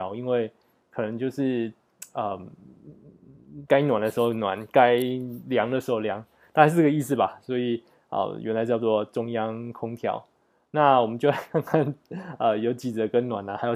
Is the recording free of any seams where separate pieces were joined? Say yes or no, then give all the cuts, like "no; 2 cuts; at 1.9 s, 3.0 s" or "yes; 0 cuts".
no; 1 cut; at 3.7 s